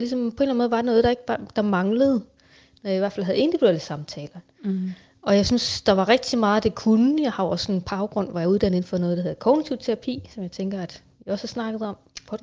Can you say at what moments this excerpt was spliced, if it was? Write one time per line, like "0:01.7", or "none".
none